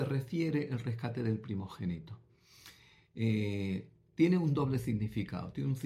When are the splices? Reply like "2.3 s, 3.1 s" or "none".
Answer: none